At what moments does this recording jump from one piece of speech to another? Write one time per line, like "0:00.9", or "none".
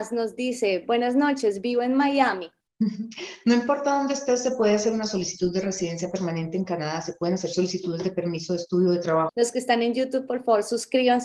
0:02.6
0:09.3